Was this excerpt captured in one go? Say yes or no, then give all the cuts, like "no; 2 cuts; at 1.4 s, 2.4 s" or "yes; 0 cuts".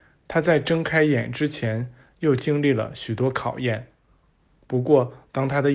yes; 0 cuts